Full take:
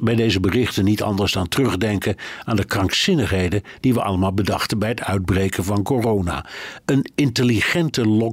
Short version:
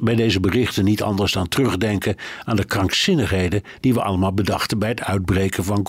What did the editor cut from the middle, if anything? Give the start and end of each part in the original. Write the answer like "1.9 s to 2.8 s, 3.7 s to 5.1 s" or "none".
none